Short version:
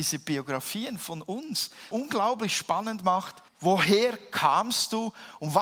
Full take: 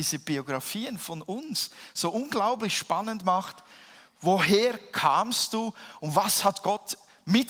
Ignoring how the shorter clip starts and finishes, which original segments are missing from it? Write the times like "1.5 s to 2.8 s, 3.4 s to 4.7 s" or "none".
1.9 s to 2.1 s, 3.7 s to 4.1 s